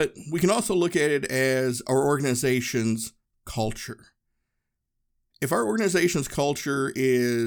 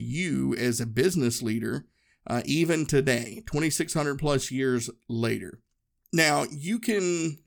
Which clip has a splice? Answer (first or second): second